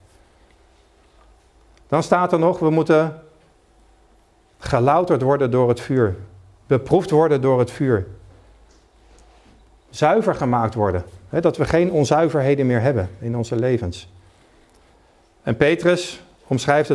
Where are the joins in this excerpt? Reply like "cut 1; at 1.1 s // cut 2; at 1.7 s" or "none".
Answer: none